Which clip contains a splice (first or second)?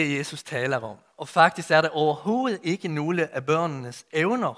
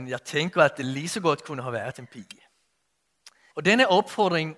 second